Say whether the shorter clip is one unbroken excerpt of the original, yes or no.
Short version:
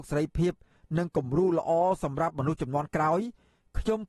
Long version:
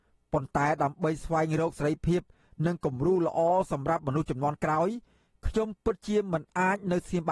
yes